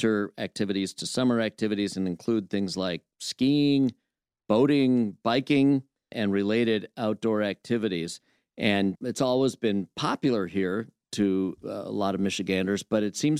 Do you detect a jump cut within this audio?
no; 0 cuts

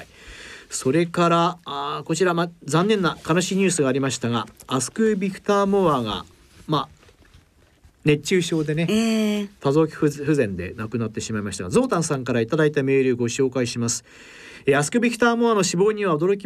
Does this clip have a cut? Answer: no; 0 cuts

